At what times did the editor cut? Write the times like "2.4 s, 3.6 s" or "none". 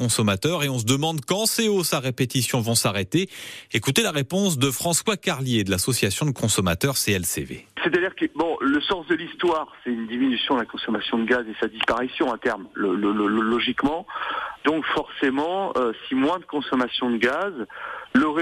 none